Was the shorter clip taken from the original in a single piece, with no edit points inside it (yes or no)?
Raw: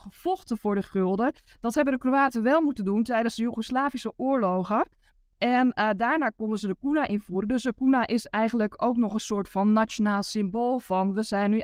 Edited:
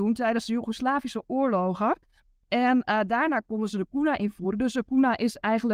yes